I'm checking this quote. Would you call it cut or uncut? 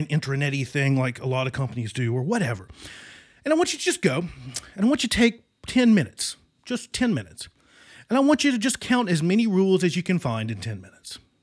cut